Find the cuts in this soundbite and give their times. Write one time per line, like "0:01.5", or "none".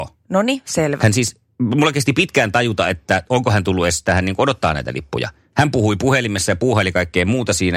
0:01.0
0:05.5